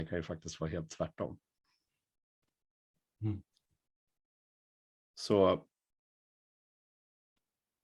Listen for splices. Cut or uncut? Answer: uncut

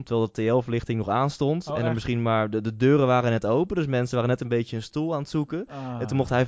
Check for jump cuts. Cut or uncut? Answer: uncut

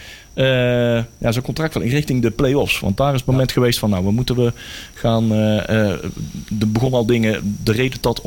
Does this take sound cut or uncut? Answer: uncut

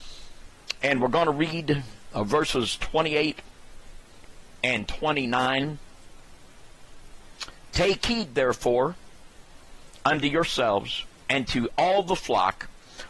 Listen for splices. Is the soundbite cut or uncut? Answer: cut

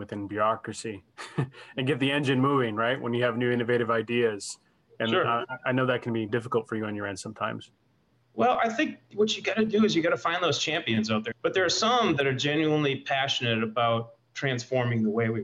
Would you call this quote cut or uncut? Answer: cut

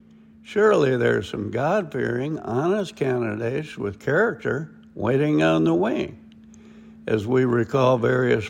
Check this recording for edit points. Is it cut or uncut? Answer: uncut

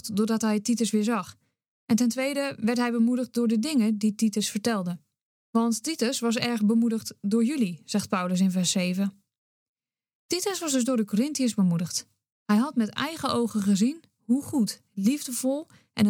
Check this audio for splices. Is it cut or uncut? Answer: uncut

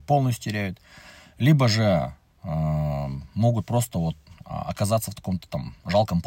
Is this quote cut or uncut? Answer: uncut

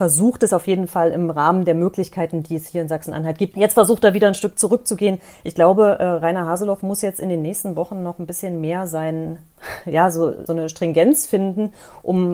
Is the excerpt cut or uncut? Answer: cut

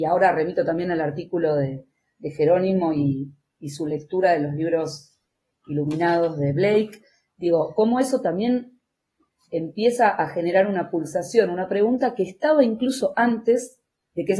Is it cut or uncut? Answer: uncut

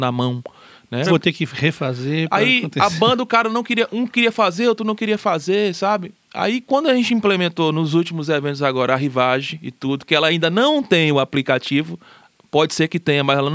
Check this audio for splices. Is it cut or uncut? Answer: cut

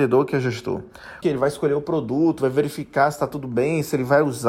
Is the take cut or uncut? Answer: cut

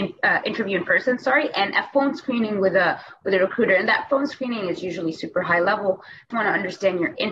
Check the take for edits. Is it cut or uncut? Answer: cut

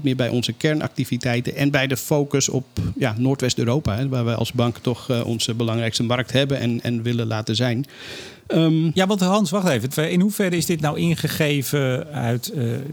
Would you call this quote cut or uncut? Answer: cut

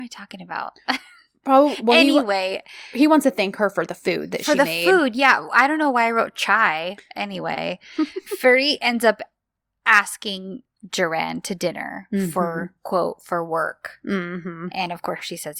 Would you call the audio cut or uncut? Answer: uncut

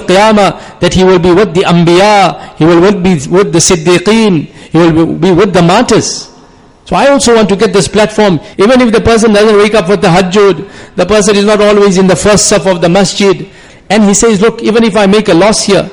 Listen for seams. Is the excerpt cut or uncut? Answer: cut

